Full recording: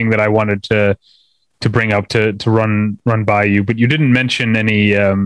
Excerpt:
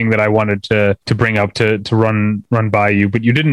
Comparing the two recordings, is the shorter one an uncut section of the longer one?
no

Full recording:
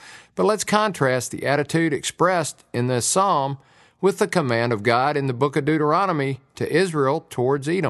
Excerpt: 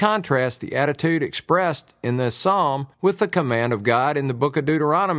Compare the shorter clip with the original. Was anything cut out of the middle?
yes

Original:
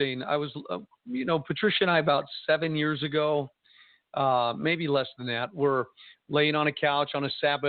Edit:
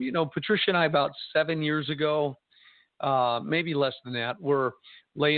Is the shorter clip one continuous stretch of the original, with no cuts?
yes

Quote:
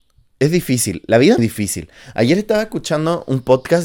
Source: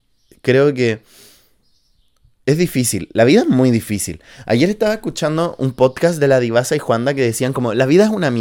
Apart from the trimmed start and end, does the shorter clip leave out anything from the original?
yes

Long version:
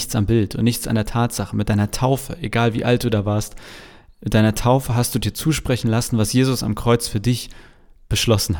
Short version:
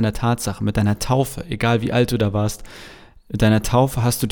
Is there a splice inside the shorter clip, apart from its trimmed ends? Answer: no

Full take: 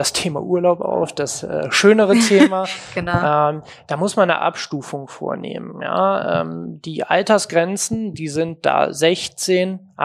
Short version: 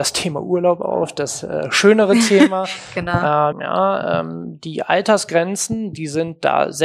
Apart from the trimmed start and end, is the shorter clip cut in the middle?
yes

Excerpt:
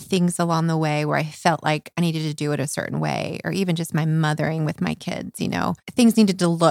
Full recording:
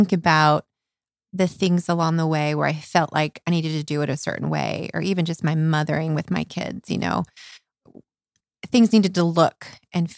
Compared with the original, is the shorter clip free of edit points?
no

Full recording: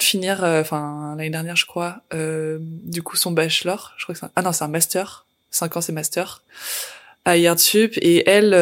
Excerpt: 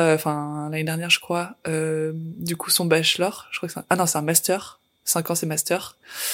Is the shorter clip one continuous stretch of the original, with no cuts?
yes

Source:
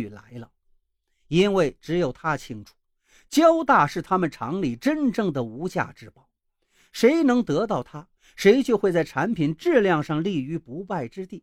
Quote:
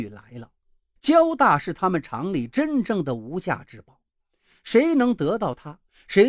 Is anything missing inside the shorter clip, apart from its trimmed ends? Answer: yes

